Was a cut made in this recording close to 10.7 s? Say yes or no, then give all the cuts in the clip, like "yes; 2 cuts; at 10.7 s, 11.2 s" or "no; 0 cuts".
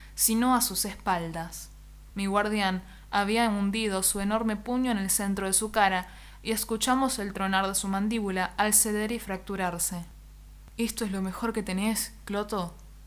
no; 1 cut; at 2.1 s